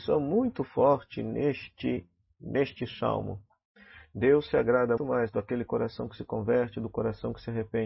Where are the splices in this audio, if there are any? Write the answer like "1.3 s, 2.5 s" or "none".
5.0 s

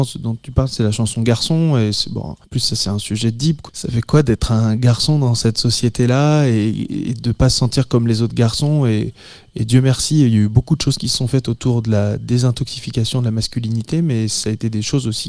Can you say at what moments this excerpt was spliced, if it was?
2.4 s, 3.7 s

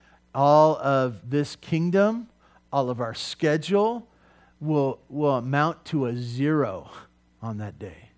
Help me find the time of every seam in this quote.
2.7 s

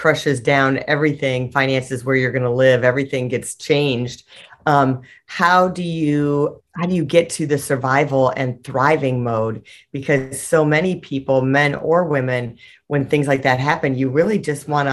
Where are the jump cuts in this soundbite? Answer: 6.6 s

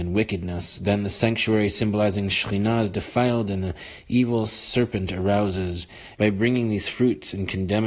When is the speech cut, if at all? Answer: 6.1 s

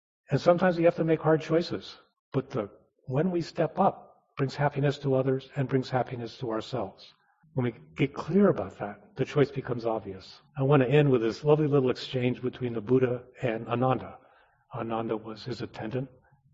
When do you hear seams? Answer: 7.4 s, 10.5 s

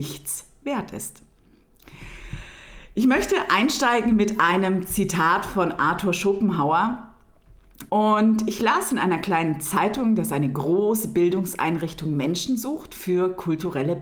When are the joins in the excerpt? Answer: 7.9 s

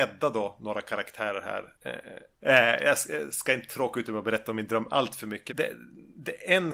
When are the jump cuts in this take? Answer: 2.4 s, 5.5 s

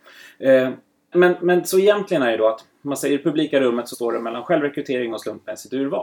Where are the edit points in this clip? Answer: 1.1 s, 3.9 s

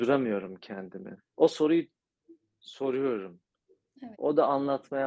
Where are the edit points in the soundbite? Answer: 1.2 s, 4.1 s

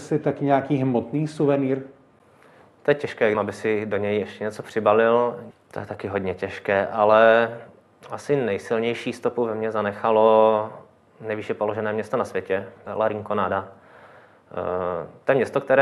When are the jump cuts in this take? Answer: 3.3 s, 5.5 s, 12.9 s

